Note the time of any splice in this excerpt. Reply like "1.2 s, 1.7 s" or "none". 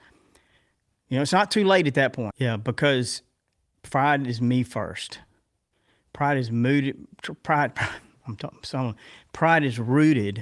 2.3 s